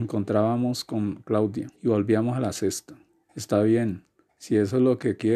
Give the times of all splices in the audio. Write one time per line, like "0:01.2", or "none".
0:01.8
0:03.2

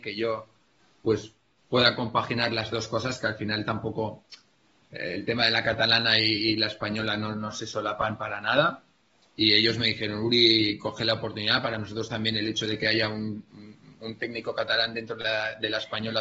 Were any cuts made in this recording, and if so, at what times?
none

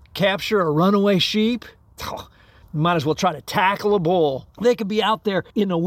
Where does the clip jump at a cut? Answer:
0:04.5

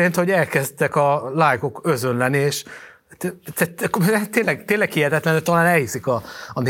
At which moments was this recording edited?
none

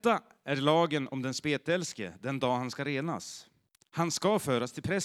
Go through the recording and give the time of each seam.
none

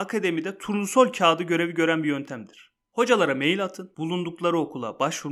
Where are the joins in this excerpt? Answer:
0:03.9

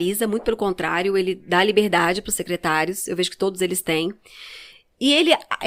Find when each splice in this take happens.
none

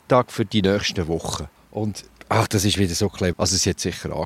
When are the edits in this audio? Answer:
0:01.6
0:03.3

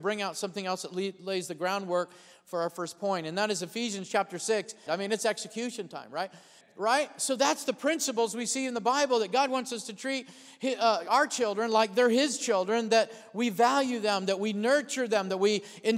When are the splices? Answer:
0:04.9
0:06.6

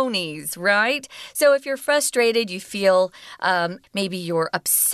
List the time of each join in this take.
0:03.8

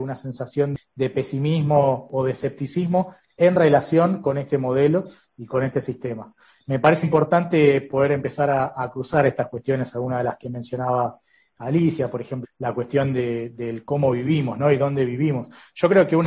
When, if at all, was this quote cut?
0:07.0
0:12.4

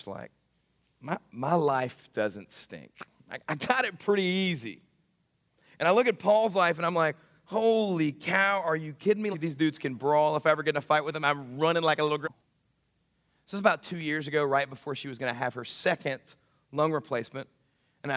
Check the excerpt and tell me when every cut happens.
0:09.3
0:12.2

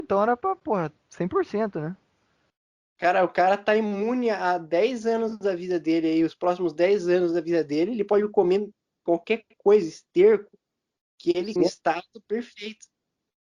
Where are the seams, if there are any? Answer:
0:11.6

